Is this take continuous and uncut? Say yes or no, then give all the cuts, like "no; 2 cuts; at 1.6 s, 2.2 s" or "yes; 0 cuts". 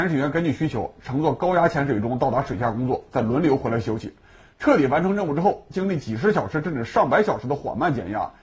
yes; 0 cuts